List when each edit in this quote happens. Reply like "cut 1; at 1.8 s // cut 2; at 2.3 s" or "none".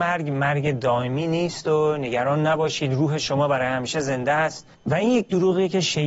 cut 1; at 4.7 s